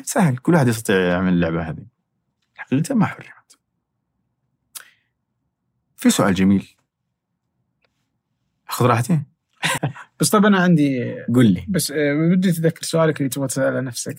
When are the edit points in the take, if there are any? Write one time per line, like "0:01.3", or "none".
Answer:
0:09.8